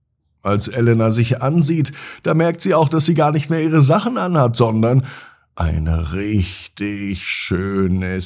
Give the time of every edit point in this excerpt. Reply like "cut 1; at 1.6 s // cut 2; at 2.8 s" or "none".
none